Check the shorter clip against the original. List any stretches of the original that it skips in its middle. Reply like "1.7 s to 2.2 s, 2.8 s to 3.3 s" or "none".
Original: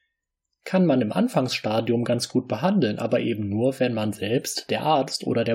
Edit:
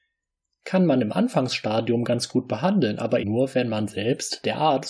3.2 s to 3.5 s